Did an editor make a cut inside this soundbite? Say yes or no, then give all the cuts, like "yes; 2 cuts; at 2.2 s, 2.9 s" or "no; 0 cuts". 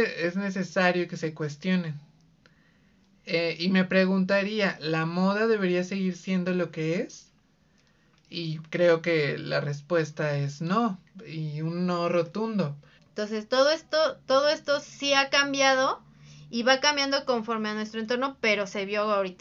yes; 1 cut; at 13.0 s